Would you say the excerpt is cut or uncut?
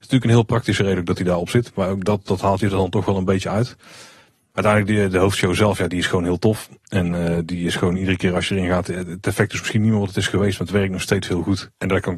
uncut